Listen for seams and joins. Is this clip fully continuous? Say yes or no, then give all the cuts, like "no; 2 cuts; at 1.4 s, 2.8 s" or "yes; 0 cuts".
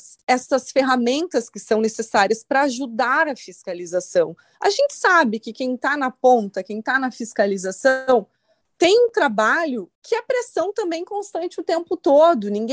yes; 0 cuts